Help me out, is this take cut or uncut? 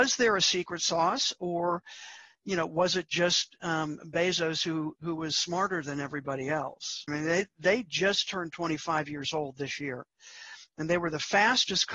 cut